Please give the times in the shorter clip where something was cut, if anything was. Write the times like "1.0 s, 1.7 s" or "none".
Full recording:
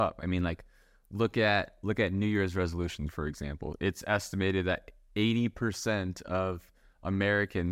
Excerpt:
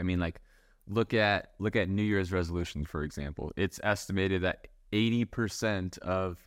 none